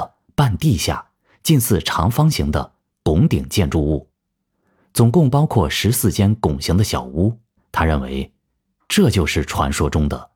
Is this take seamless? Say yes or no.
no